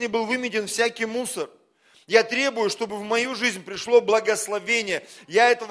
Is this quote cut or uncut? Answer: uncut